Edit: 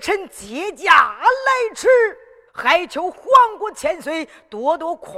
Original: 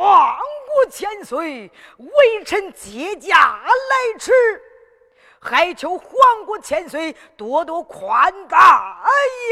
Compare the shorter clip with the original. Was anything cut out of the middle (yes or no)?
yes